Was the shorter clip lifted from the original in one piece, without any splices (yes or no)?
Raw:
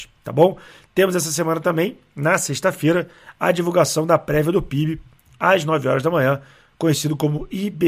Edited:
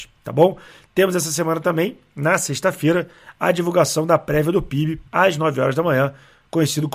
no